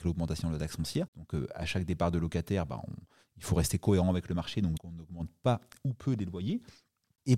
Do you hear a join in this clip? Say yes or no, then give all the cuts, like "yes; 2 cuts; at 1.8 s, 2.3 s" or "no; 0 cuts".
yes; 2 cuts; at 1.1 s, 4.8 s